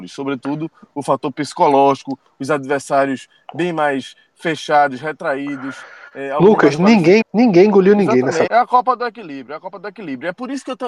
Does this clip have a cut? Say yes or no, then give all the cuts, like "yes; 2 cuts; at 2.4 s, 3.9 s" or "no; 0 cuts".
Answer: yes; 2 cuts; at 7.2 s, 8.5 s